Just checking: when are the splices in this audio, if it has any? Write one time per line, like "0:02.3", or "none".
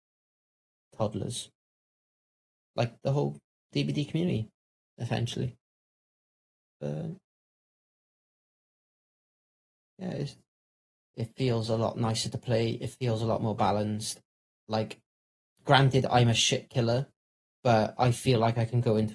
0:11.1